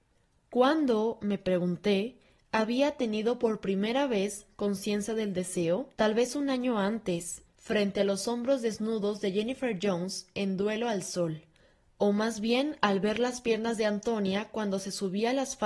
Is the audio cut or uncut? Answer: cut